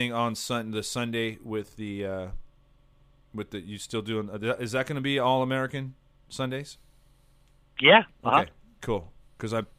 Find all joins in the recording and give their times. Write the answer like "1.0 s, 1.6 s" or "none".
none